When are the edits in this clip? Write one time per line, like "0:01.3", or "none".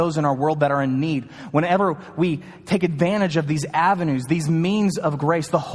none

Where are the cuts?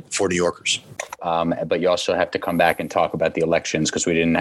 0:01.2

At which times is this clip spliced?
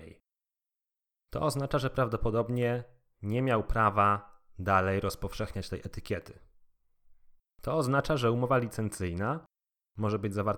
0:01.2
0:07.4

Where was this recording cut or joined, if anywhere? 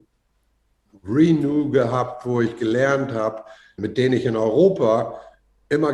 0:03.8

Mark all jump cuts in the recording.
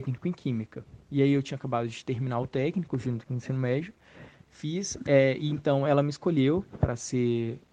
none

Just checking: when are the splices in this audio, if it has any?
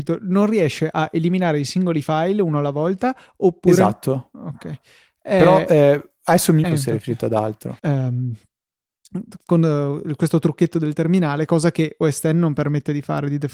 0:06.6
0:07.8

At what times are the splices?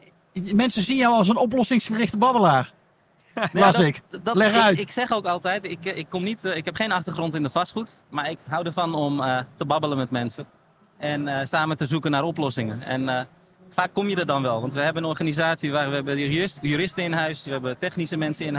0:08.1

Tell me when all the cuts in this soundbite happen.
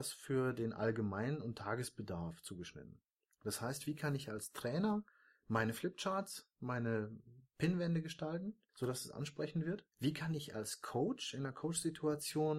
0:08.7
0:09.9

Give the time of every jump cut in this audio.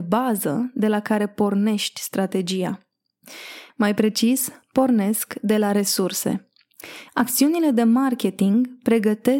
0:03.7
0:07.1

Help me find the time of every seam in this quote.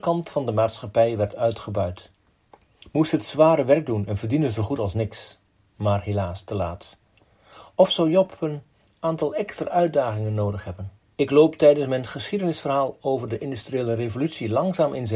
0:11.0

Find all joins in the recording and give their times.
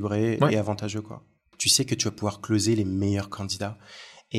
0:01.5

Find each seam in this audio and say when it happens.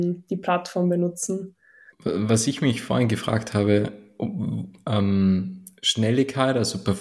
0:01.9

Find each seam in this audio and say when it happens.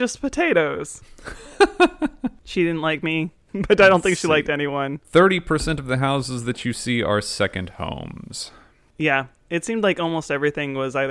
0:05.0

